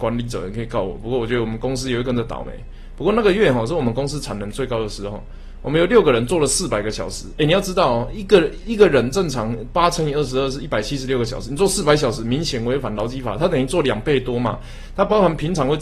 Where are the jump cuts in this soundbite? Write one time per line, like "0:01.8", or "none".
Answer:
none